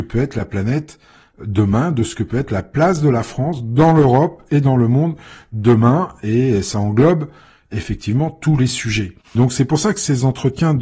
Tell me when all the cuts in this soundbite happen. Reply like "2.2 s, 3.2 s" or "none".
9.4 s